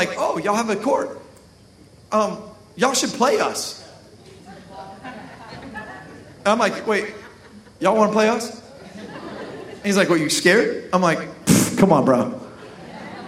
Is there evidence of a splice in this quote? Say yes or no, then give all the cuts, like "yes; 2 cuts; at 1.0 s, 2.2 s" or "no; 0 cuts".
no; 0 cuts